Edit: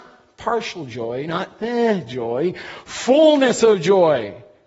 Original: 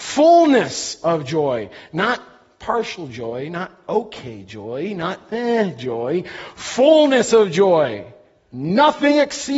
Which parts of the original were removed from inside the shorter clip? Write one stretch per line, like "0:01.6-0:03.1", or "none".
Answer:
0:03.5-0:05.0

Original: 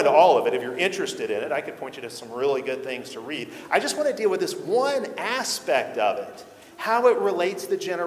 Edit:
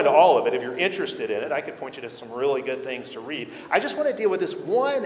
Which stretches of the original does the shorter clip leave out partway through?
none

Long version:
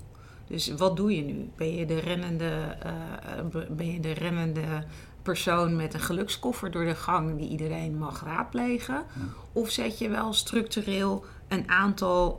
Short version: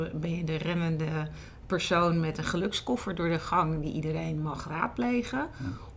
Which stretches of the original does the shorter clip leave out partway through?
none

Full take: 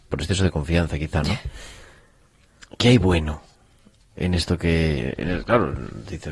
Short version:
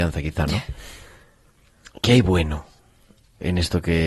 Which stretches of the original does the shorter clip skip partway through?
none

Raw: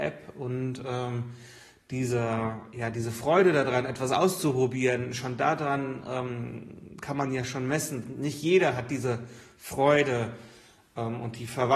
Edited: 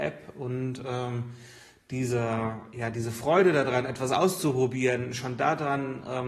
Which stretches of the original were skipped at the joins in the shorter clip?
none

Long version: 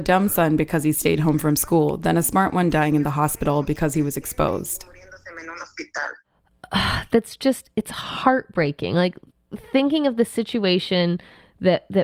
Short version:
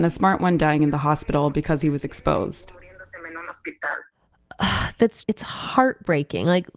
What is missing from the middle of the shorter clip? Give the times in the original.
0:07.4-0:07.7

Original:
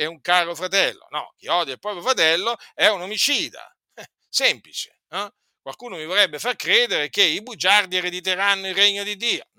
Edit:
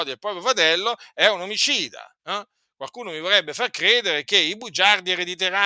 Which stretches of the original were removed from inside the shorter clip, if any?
0:03.8-0:05.0

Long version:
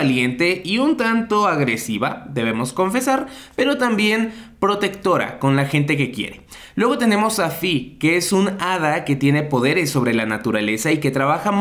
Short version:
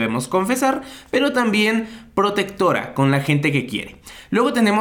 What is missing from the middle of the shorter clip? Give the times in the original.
none

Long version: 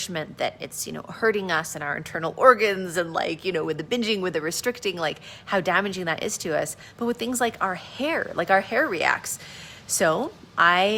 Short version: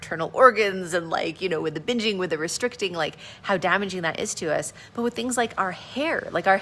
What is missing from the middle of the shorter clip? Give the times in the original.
none

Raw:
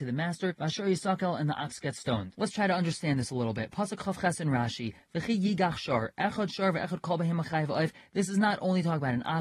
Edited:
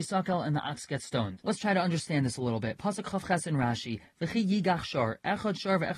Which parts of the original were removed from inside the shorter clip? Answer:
none

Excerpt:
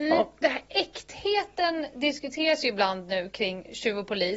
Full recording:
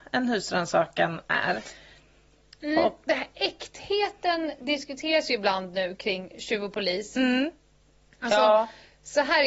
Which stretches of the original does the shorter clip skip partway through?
none

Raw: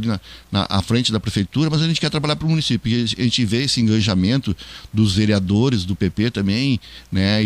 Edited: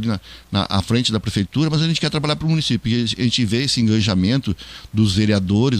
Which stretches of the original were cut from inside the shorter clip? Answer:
none

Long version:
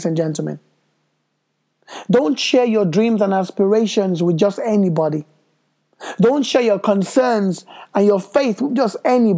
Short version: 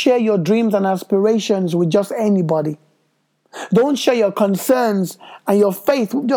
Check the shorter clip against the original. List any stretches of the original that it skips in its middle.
none

